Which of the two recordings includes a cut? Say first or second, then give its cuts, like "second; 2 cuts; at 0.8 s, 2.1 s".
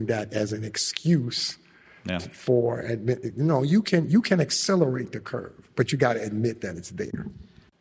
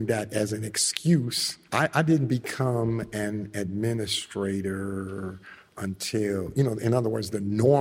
second; 1 cut; at 1.7 s